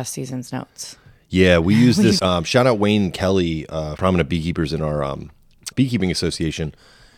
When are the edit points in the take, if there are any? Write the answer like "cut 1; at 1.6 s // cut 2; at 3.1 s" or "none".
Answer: cut 1; at 2.2 s // cut 2; at 4.0 s // cut 3; at 5.7 s